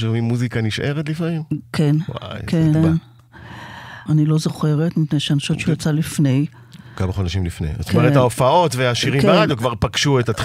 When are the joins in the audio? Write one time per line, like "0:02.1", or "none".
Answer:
0:02.7
0:04.1

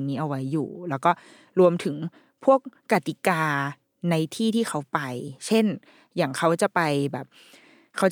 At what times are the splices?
none

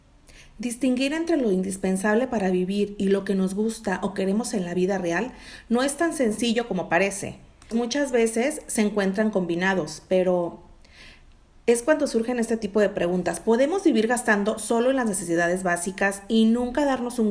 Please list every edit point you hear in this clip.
0:07.7

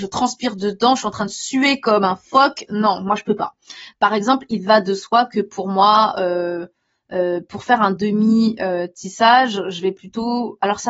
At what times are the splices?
0:03.9

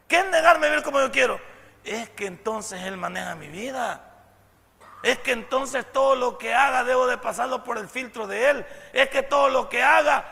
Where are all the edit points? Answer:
none

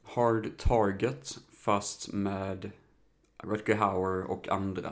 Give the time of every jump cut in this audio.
0:03.4

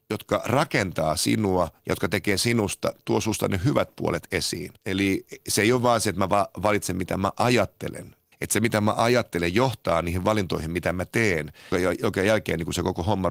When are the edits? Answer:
0:04.8
0:08.3
0:11.7

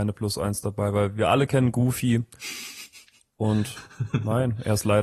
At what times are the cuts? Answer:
none

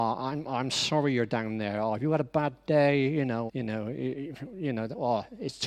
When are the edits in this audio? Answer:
0:03.5

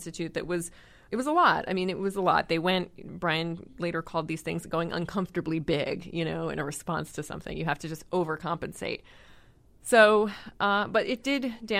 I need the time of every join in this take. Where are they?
none

